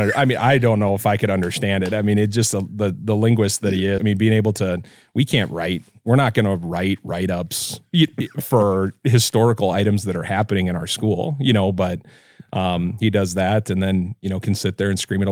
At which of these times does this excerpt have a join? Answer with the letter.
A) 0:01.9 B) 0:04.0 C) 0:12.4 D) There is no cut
B